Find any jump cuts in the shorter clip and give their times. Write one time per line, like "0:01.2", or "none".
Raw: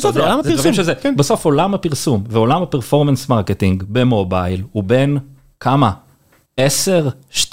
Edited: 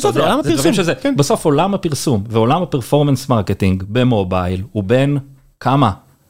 none

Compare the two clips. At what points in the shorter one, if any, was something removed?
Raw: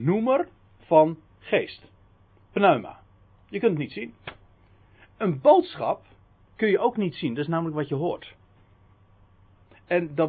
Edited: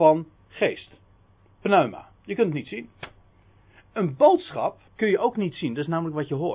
0:02.2
0:04.9

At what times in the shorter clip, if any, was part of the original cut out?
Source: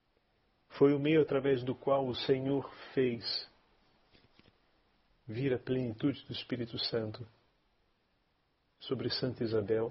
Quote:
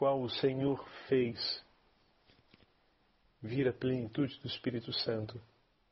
none

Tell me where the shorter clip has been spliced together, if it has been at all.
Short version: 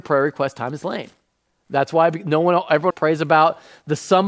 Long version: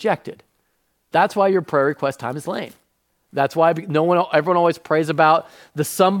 0:02.9

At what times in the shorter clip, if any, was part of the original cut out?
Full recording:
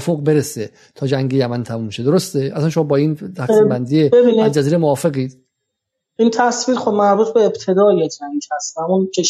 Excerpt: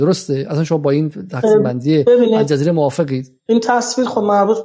0:03.4

